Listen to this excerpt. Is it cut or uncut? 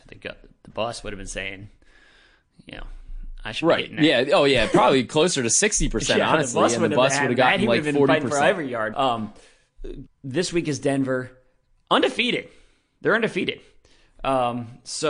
cut